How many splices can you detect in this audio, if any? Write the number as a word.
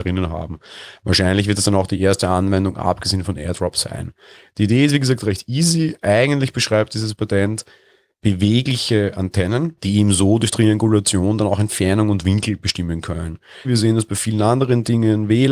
two